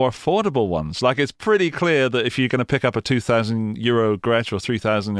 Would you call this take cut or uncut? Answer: uncut